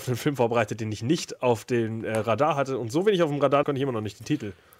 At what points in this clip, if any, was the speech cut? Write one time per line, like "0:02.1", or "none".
0:03.6